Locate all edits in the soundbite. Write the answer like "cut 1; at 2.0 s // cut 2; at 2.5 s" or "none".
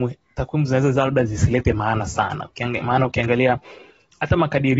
none